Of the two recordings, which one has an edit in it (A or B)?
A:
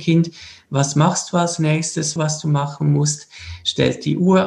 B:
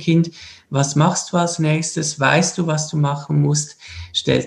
A